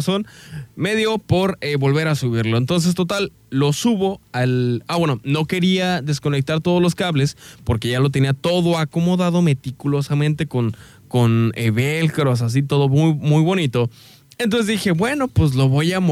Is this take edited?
no; 0 cuts

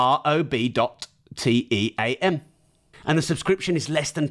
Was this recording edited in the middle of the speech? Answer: yes; 1 cut; at 2.9 s

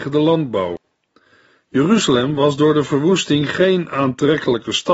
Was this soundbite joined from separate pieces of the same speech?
no; 0 cuts

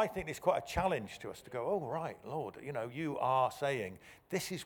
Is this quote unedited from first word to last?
yes; 0 cuts

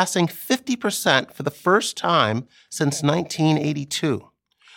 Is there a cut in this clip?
no; 0 cuts

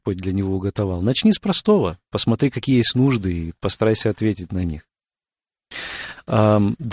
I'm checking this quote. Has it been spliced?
no; 0 cuts

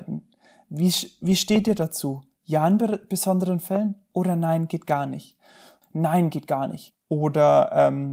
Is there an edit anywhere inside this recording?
yes; 1 cut; at 5.8 s

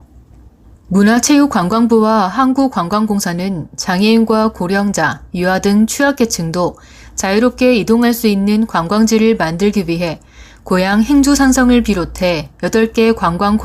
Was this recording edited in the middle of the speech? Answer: no; 0 cuts

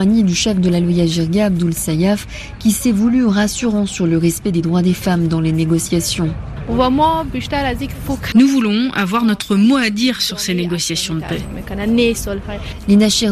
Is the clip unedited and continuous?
no; 1 cut; at 8.3 s

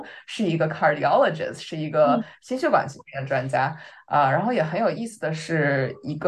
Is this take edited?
no; 0 cuts

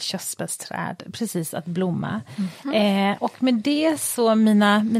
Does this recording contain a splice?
no; 0 cuts

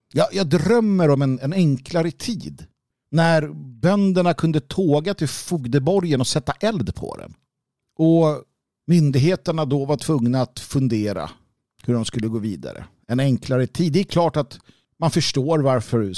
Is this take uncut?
yes; 0 cuts

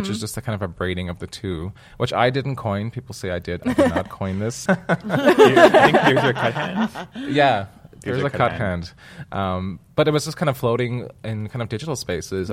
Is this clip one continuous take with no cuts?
no; 1 cut; at 4.7 s

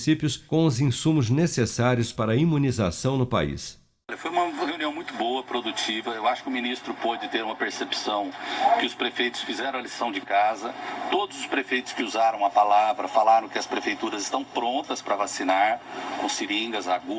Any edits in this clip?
no; 0 cuts

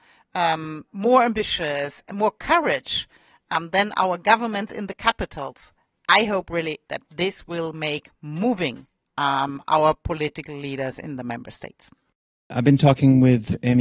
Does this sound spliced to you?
no; 0 cuts

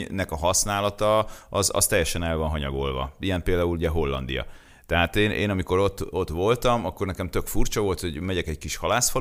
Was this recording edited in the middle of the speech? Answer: no; 0 cuts

